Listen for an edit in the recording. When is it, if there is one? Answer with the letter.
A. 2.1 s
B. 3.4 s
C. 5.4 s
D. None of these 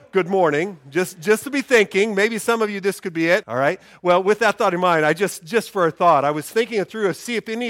B